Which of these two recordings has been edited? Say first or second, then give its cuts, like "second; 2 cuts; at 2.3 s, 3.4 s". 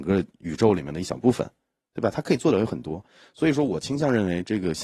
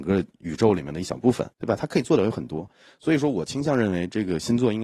second; 1 cut; at 1.5 s